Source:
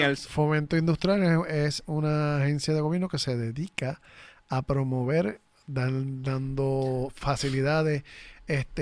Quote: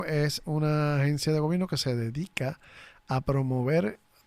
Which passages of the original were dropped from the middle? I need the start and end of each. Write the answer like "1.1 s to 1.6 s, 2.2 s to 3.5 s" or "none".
none